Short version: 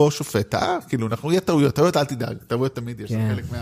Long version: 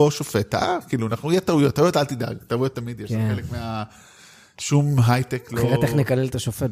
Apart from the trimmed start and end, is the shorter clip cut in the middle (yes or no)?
no